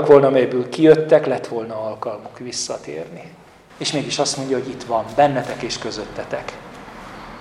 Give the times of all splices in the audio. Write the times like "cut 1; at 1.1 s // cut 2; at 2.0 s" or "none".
cut 1; at 3.7 s